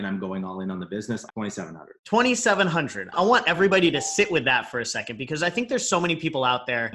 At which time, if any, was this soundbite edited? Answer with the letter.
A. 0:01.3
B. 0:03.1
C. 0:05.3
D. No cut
A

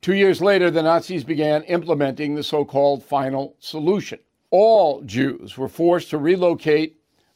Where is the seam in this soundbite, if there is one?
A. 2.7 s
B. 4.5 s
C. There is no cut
B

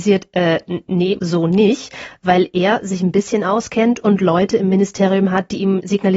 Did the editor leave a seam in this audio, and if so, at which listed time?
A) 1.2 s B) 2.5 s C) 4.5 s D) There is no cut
A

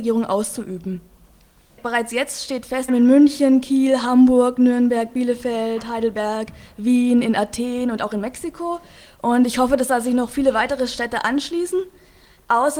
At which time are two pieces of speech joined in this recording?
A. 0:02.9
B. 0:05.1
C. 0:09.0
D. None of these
A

